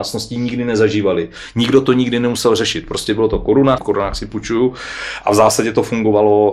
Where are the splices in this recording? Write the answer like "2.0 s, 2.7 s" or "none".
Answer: 3.8 s

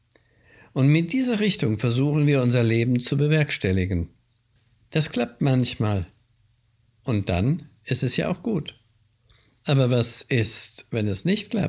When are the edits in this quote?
none

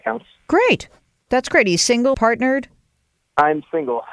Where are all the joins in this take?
2.1 s

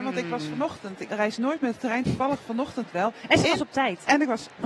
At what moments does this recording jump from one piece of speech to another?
1.1 s

